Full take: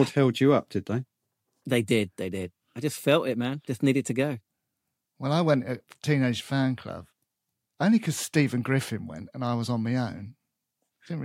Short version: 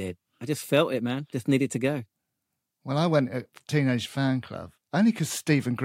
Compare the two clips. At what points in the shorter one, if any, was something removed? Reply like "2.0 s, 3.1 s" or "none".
4.8 s